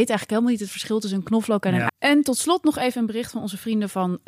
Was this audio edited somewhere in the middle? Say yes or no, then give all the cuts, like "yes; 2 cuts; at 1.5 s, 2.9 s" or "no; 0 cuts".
yes; 1 cut; at 1.9 s